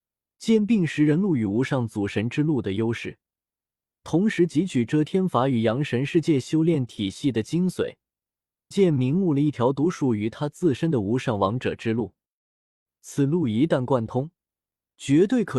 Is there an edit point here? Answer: yes; 1 cut; at 8.7 s

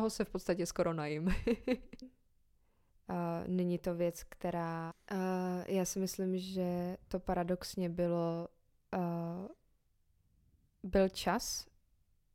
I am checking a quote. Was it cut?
yes; 2 cuts; at 2.0 s, 4.9 s

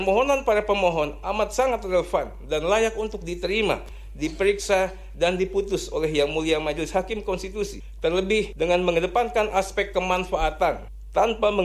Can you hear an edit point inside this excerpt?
yes; 1 cut; at 5.1 s

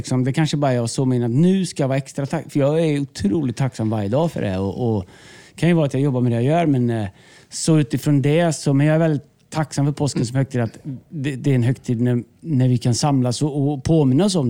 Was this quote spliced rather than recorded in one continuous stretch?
no; 0 cuts

